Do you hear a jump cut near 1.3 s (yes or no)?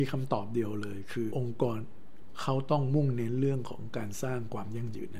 yes